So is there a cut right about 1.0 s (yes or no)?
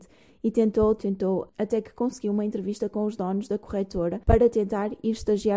yes